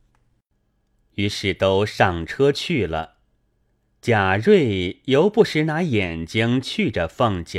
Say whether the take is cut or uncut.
uncut